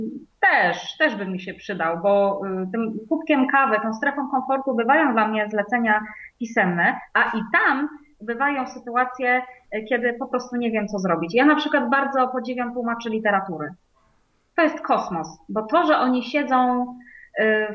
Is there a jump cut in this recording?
no; 0 cuts

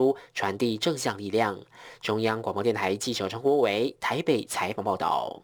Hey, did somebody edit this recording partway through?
no; 0 cuts

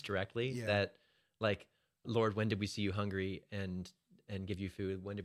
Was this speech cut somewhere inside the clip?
yes; 1 cut; at 2.0 s

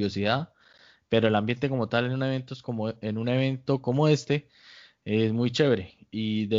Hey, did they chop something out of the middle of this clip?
no; 0 cuts

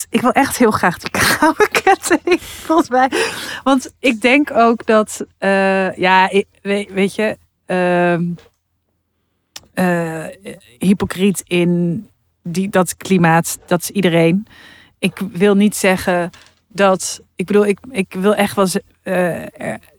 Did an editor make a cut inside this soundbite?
no; 0 cuts

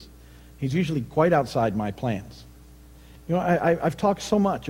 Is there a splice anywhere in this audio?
yes; 1 cut; at 3.2 s

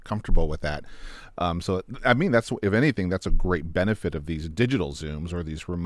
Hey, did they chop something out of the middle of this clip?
no; 0 cuts

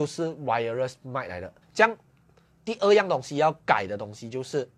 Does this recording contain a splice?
yes; 1 cut; at 1.6 s

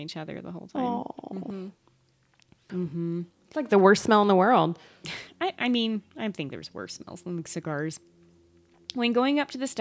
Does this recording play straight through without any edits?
no; 1 cut; at 2.7 s

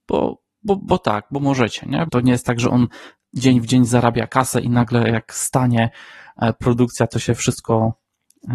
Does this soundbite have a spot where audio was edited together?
yes; 1 cut; at 2.1 s

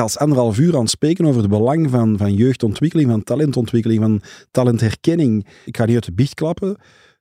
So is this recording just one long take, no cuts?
no; 1 cut; at 5.6 s

